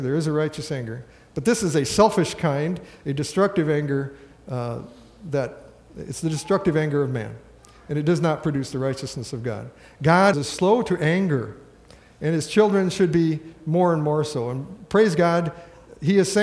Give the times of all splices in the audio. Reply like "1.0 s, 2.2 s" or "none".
10.3 s